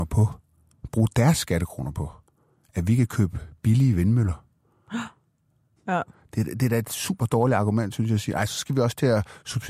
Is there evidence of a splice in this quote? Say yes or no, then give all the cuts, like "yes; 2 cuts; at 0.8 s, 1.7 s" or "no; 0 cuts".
yes; 1 cut; at 5.8 s